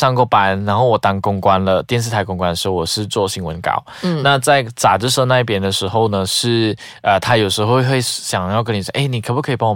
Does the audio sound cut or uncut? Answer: uncut